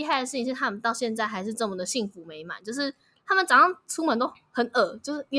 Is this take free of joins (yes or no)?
yes